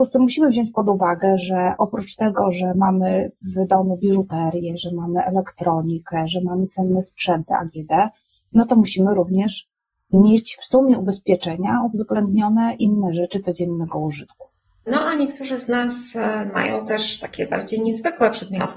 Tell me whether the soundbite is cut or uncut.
uncut